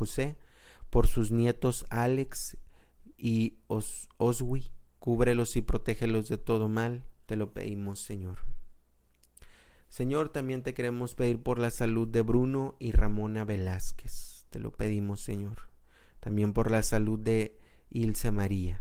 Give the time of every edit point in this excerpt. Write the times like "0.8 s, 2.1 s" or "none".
7.3 s